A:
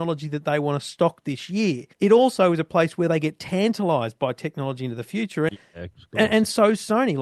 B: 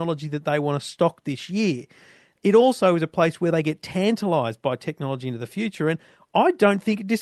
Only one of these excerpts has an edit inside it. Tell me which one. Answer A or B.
A